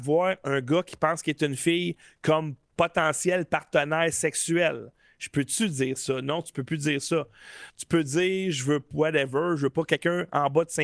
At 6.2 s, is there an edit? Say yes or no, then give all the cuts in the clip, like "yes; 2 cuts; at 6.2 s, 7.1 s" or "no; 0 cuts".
no; 2 cuts; at 7.7 s, 8.9 s